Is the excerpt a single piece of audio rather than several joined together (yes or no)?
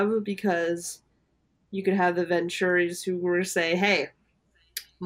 yes